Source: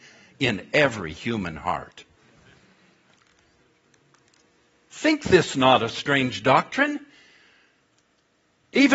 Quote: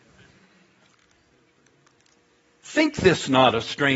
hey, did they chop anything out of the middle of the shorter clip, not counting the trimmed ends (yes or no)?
no